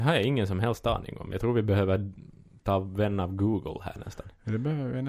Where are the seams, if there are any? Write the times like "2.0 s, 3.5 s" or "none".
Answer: none